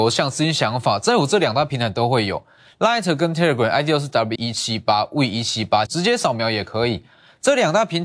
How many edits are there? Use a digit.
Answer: 2